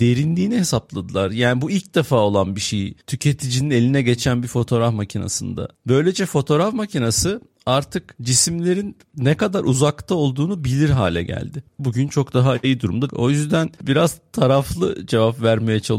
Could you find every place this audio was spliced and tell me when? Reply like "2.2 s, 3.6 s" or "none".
11.8 s, 13.1 s